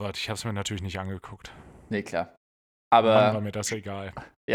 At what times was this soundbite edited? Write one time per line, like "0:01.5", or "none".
none